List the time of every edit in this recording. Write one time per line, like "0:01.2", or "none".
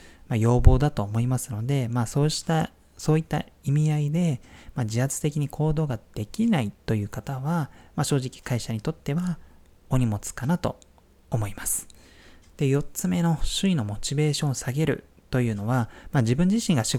0:12.5